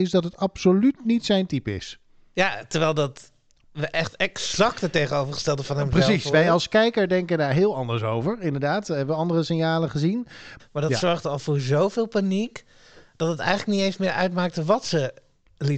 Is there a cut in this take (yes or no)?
yes